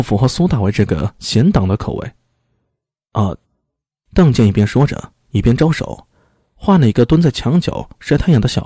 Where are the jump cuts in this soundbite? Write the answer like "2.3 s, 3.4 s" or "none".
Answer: 3.4 s